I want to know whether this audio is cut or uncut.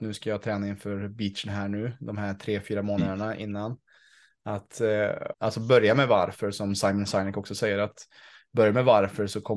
cut